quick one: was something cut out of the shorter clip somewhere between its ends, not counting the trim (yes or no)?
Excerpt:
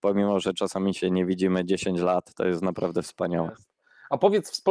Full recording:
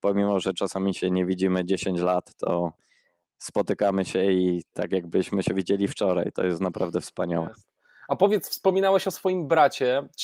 yes